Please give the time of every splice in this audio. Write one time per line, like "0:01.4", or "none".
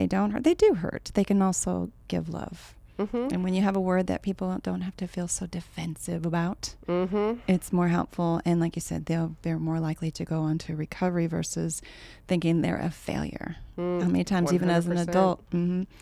none